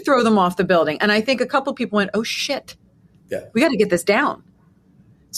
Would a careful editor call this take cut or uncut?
uncut